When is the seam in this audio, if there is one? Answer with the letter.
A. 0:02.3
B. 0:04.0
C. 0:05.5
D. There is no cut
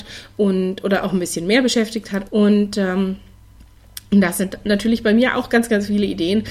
A